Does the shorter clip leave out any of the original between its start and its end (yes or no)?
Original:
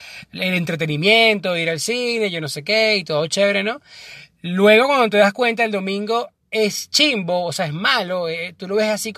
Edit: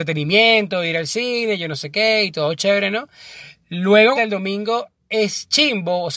yes